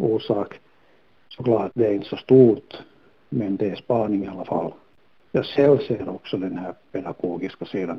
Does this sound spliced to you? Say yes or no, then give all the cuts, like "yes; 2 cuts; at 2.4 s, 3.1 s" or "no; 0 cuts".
no; 0 cuts